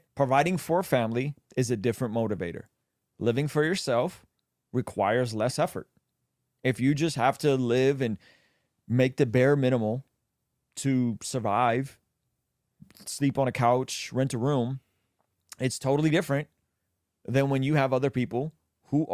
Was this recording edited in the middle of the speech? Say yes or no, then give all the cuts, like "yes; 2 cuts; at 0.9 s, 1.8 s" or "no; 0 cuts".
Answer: no; 0 cuts